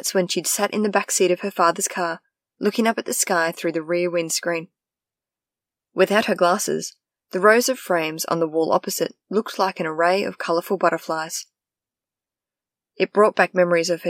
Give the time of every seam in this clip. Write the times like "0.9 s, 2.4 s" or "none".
5.9 s